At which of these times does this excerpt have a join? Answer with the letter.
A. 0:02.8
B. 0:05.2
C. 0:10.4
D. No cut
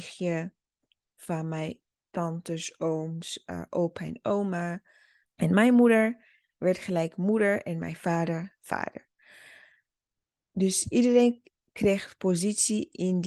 B